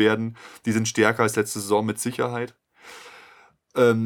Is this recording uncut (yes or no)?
yes